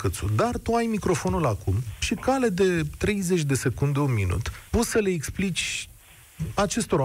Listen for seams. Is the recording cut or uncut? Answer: cut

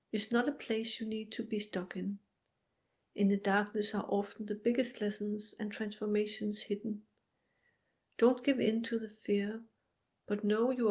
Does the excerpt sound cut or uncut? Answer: uncut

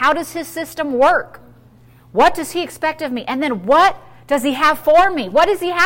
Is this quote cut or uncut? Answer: uncut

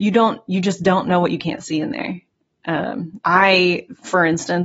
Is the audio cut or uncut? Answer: cut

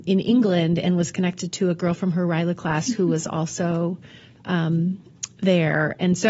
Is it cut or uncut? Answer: uncut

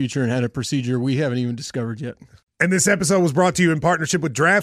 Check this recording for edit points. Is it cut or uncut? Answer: uncut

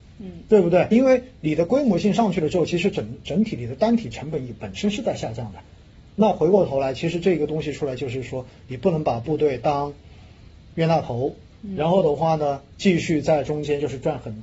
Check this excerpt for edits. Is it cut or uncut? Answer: cut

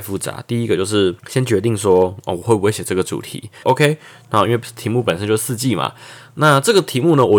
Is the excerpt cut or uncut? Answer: cut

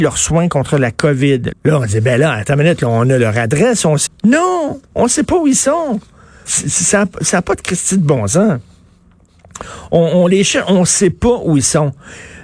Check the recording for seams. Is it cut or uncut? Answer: cut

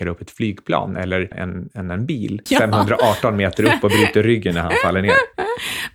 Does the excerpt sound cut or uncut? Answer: cut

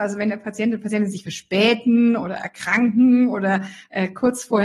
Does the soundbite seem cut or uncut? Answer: uncut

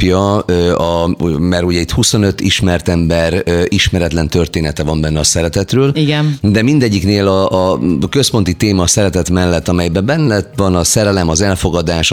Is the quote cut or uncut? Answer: uncut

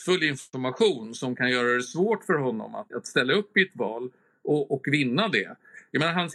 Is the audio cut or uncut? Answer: cut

